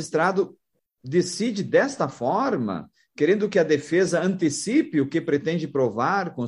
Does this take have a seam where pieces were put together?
no; 0 cuts

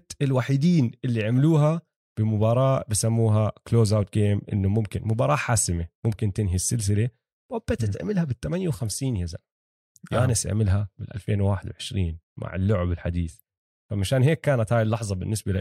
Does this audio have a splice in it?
no; 0 cuts

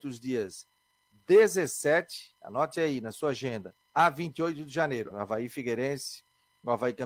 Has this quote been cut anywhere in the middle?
yes; 2 cuts; at 3.8 s, 5.1 s

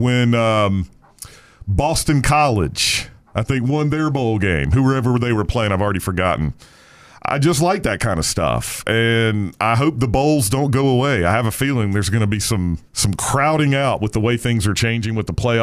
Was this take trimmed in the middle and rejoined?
yes; 1 cut; at 12.9 s

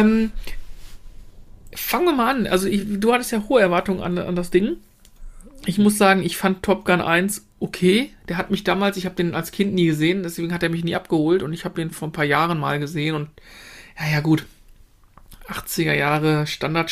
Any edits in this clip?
no; 0 cuts

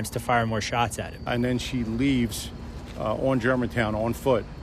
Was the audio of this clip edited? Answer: no; 0 cuts

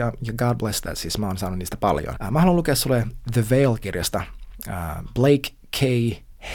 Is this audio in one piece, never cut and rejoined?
no; 1 cut; at 2.2 s

